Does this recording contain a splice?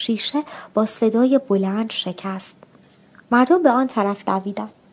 no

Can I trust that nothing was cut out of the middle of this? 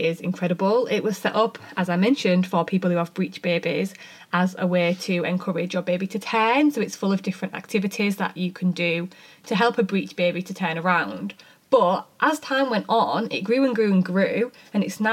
yes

